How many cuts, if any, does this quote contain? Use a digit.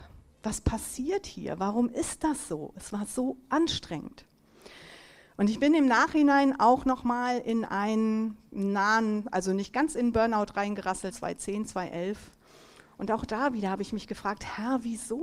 1